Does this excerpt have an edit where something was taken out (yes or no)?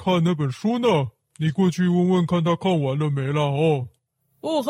no